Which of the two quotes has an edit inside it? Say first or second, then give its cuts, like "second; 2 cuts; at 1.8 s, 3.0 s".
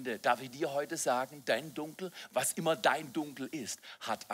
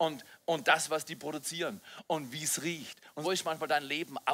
second; 1 cut; at 3.2 s